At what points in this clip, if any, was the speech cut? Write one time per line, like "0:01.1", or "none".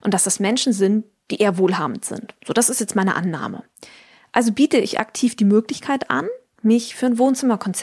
none

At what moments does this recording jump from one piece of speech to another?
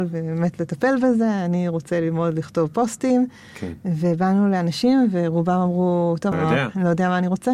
0:06.3

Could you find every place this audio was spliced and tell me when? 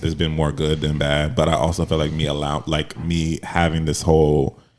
none

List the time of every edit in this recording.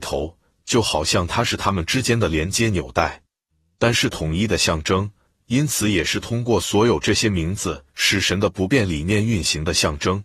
0:03.9

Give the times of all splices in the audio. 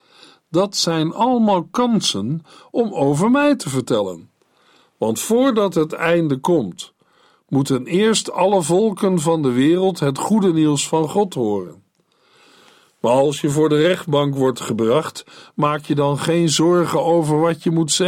none

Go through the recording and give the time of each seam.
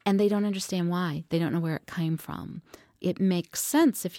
none

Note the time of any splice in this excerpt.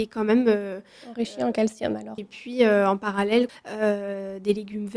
0:02.2
0:03.5

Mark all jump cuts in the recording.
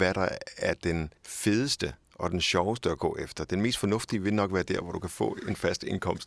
0:01.2

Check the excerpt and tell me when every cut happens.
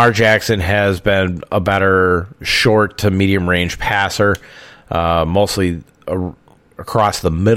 none

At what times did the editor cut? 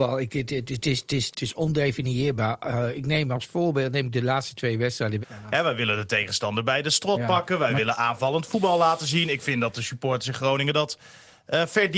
0:01.3
0:05.2

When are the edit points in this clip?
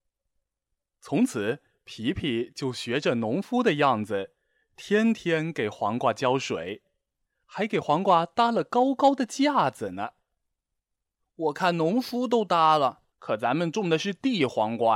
0:11.2
0:13.1

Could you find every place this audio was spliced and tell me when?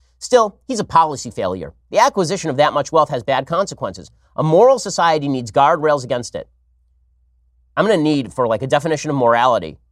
none

